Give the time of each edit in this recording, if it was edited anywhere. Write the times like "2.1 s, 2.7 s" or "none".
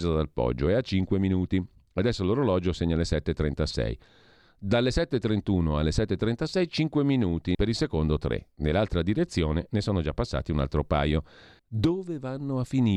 7.5 s, 11.6 s